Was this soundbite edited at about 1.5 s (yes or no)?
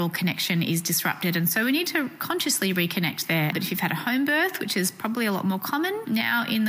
no